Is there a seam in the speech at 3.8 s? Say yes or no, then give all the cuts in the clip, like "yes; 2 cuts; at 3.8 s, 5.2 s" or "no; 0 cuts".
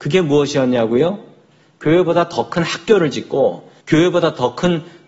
yes; 1 cut; at 3.8 s